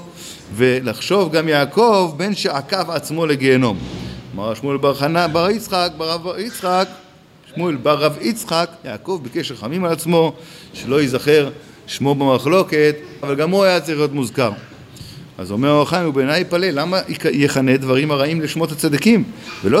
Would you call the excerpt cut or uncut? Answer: cut